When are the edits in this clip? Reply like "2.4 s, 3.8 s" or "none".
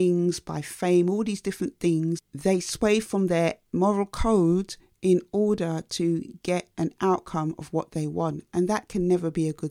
none